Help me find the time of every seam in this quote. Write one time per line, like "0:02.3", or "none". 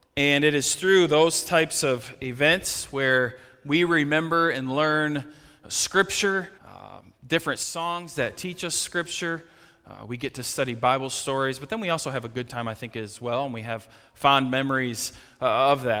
0:06.5